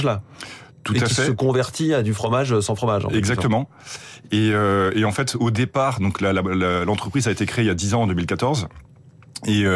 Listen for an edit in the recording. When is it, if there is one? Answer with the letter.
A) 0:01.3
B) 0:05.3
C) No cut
C